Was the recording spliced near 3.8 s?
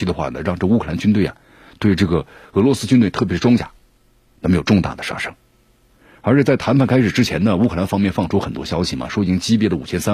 no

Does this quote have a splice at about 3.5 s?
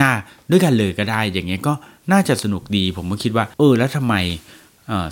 yes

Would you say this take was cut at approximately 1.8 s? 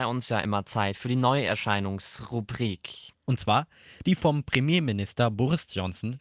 no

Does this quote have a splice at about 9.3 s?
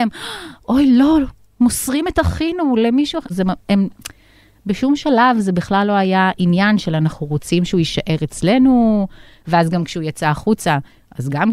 no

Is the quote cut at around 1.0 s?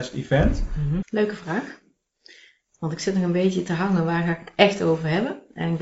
yes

